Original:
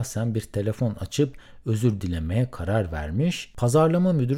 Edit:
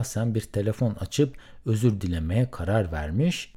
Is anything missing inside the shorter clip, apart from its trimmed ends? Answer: no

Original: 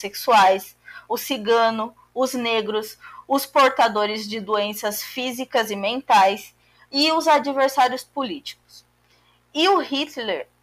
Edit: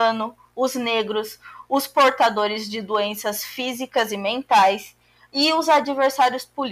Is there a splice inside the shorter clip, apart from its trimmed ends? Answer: no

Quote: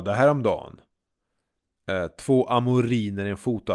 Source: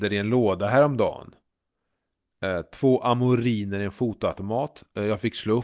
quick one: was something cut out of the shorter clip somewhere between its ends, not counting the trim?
no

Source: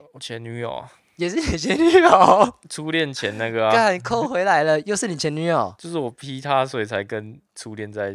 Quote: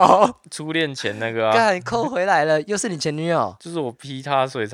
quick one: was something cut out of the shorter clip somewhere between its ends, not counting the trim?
no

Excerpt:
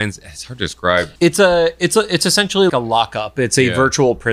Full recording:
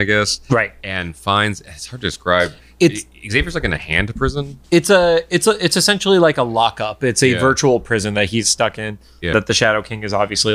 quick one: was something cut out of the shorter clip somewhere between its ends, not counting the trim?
yes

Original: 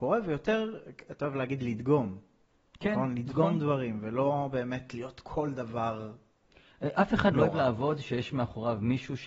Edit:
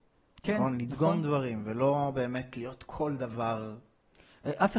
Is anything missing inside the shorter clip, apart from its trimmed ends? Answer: no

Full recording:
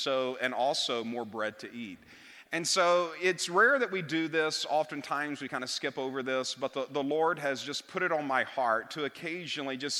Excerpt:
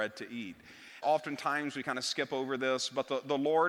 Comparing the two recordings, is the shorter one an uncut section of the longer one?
no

